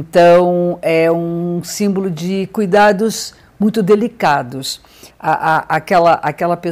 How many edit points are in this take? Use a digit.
1